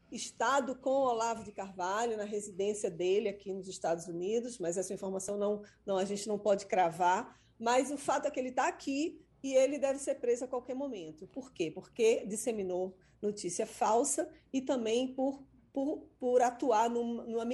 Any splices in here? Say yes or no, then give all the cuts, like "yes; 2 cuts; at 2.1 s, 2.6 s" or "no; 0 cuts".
no; 0 cuts